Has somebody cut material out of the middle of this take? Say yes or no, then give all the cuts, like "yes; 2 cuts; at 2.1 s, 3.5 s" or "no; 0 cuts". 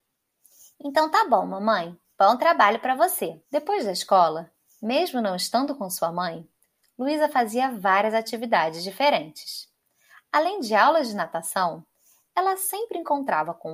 yes; 1 cut; at 3.4 s